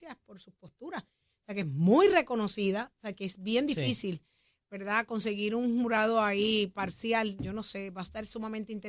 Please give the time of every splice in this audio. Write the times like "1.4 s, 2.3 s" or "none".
none